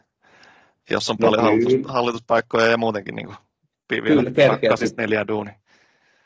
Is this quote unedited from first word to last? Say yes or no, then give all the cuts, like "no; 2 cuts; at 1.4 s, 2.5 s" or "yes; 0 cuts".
yes; 0 cuts